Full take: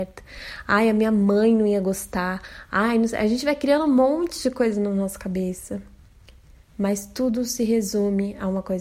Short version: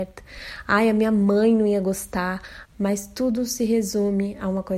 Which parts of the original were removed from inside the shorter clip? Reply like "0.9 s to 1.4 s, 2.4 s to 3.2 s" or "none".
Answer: 2.7 s to 6.6 s